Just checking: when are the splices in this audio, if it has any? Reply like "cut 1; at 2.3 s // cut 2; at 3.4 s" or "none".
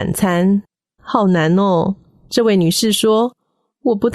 cut 1; at 1.0 s